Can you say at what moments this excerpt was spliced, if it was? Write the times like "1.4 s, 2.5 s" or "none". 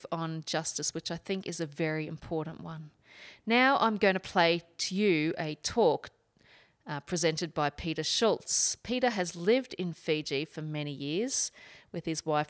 none